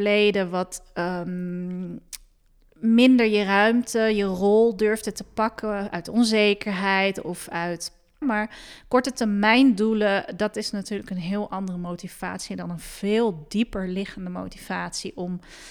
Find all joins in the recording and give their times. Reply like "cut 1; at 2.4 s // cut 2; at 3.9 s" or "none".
cut 1; at 8.2 s